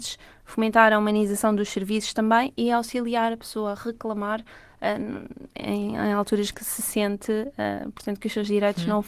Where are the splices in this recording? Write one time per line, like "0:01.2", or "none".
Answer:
none